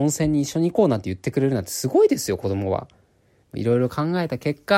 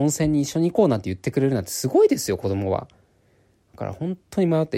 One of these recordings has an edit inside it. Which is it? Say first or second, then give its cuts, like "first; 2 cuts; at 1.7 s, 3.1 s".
first; 1 cut; at 3.4 s